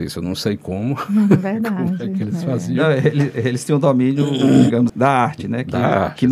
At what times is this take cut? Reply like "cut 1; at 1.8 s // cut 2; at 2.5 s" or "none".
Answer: cut 1; at 4.9 s